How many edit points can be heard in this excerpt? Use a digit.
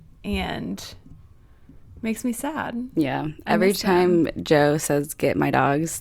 0